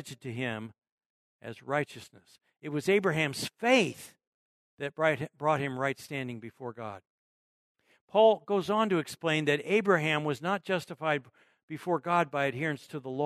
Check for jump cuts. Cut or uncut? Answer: uncut